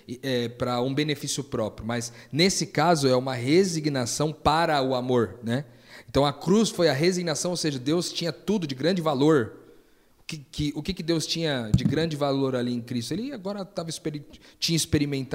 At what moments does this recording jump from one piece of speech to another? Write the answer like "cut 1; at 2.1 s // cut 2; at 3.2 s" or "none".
none